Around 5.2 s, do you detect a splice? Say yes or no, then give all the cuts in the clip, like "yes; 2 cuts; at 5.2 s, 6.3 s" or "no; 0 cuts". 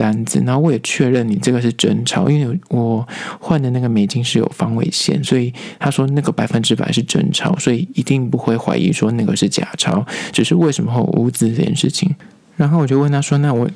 no; 0 cuts